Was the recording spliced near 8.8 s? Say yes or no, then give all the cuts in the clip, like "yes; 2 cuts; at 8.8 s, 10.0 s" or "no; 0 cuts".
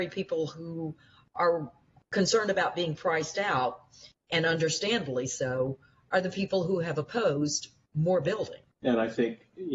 yes; 1 cut; at 8.8 s